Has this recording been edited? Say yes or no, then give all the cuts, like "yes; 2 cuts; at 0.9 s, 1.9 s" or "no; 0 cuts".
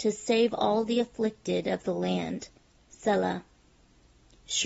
no; 0 cuts